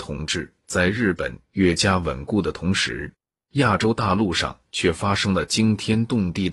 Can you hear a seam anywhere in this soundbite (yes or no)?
no